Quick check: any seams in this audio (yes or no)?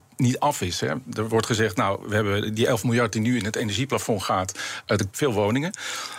yes